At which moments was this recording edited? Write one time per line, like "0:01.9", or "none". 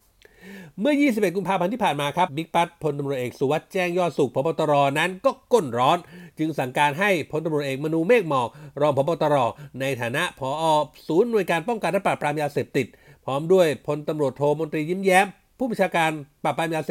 0:02.3